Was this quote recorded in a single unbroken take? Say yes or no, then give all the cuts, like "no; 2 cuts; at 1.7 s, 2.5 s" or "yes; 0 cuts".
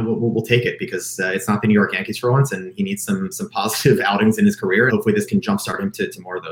no; 1 cut; at 4.9 s